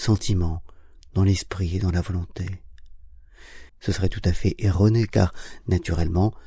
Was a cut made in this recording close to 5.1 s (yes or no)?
no